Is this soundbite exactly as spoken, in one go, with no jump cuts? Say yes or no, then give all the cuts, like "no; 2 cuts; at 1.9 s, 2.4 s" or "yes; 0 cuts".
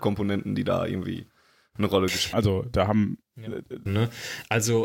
no; 2 cuts; at 2.3 s, 3.9 s